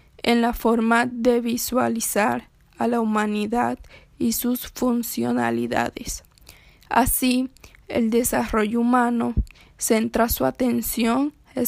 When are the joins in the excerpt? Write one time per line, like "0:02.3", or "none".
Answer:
none